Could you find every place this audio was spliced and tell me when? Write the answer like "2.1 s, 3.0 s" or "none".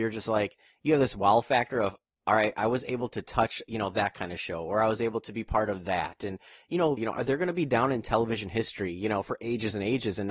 7.0 s